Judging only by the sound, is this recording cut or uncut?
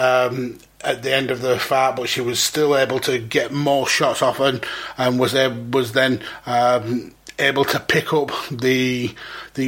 uncut